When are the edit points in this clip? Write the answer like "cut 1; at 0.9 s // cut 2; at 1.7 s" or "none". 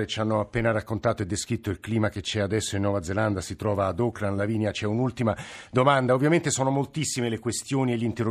none